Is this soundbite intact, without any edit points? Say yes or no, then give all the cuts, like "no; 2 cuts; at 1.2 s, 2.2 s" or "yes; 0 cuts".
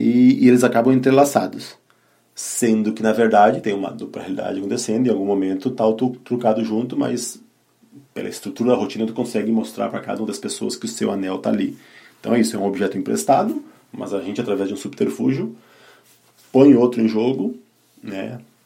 yes; 0 cuts